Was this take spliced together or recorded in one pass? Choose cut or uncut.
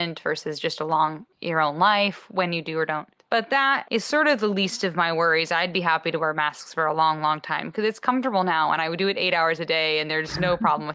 uncut